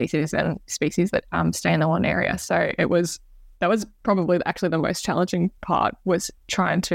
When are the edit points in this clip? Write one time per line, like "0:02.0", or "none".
0:01.2

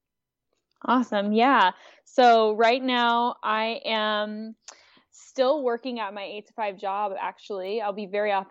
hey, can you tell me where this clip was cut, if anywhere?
none

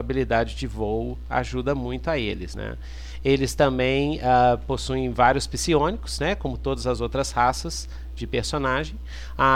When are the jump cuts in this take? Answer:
none

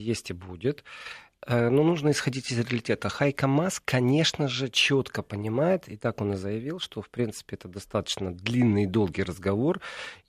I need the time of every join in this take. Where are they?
none

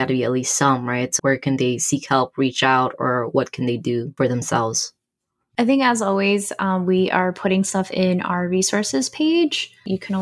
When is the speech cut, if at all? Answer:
0:01.2

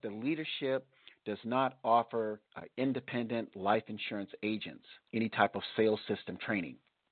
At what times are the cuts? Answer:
0:02.5
0:05.0

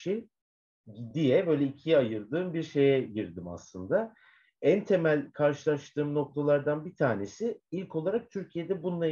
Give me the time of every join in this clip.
none

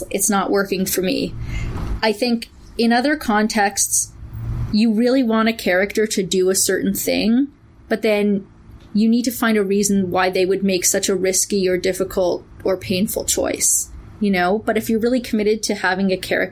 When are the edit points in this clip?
none

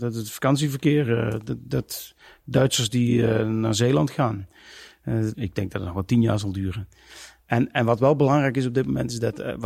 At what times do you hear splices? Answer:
0:05.3
0:07.4

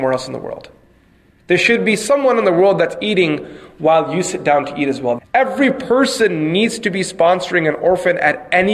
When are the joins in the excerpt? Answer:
0:05.2

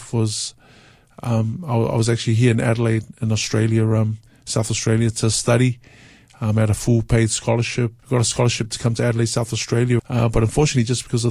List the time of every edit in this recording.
0:08.0
0:10.0

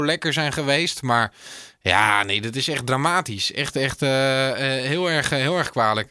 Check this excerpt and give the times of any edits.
none

